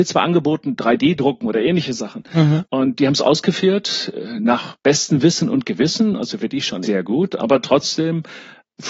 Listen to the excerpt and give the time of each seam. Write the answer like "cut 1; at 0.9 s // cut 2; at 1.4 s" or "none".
cut 1; at 2.6 s // cut 2; at 6.8 s

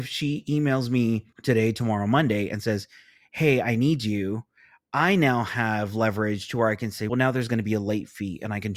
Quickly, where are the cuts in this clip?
cut 1; at 1.3 s // cut 2; at 7.1 s

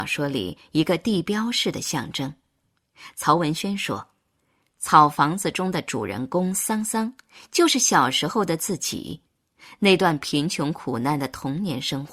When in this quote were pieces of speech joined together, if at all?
none

